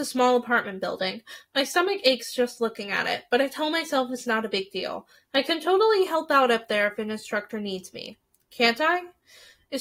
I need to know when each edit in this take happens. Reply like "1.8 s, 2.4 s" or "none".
none